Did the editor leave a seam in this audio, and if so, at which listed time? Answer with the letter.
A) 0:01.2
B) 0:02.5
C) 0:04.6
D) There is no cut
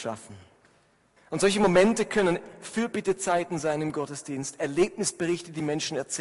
A